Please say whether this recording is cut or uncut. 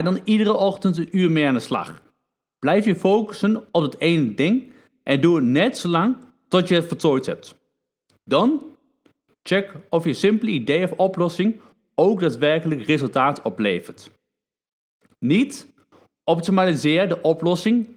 uncut